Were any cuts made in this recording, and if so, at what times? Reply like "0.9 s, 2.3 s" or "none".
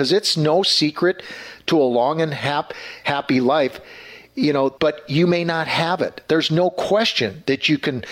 4.8 s